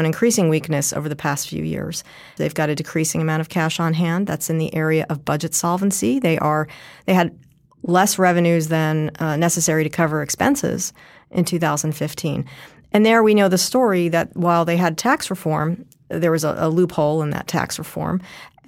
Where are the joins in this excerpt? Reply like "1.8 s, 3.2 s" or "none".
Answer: 2.4 s